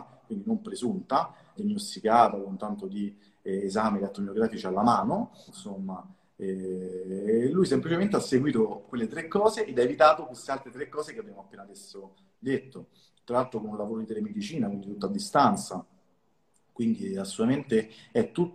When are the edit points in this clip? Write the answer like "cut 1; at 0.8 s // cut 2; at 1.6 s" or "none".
cut 1; at 1.6 s // cut 2; at 5.5 s